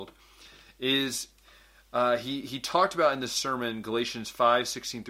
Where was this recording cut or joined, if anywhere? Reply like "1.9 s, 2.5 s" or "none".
none